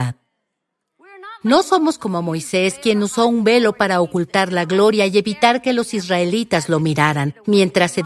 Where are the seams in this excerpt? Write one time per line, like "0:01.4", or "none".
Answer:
none

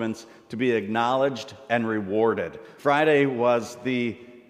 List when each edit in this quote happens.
0:02.8

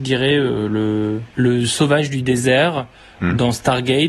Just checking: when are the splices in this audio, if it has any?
0:01.3

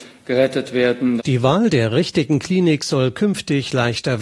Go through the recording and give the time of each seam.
0:01.2

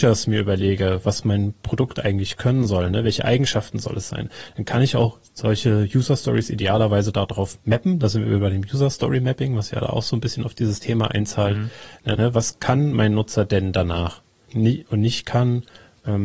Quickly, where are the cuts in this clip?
0:12.1
0:14.5

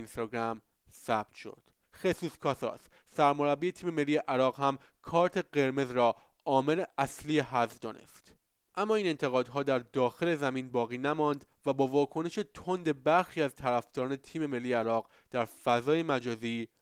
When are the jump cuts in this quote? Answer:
0:01.8

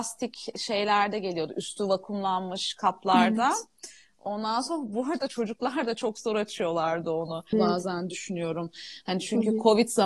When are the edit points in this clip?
0:07.5

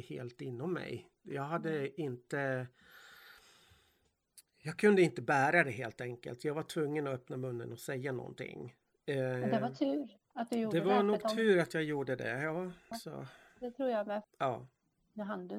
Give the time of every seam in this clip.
0:12.9
0:14.2

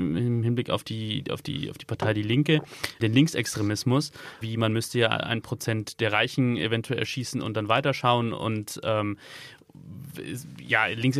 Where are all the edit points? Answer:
0:03.0
0:04.4

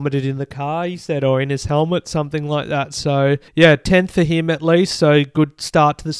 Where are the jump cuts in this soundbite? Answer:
0:03.5

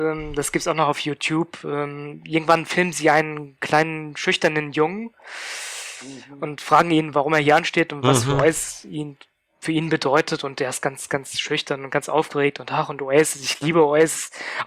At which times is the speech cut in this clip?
none

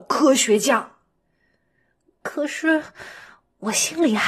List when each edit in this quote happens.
none

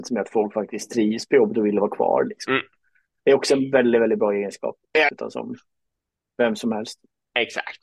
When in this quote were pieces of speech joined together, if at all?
0:05.1

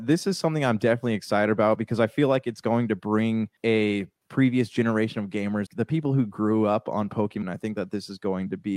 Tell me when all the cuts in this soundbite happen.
0:03.6
0:05.7
0:07.4

